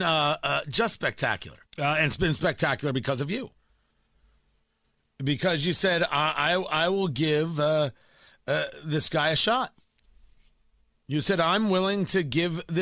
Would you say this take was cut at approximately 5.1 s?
no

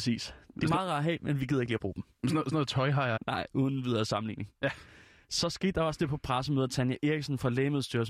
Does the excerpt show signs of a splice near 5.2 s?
no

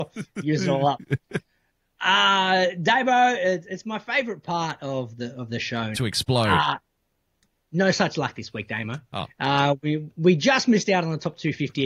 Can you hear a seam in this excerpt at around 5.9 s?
yes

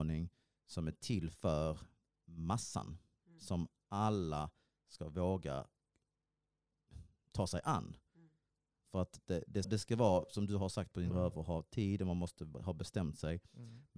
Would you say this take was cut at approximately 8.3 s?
no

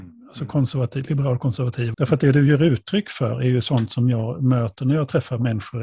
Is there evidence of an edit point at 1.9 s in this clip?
yes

